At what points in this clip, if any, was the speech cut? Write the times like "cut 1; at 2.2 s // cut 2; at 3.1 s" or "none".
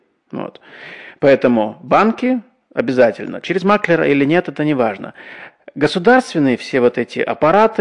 none